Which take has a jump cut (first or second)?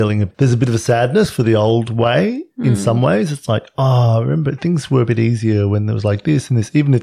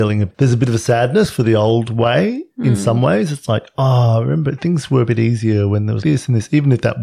second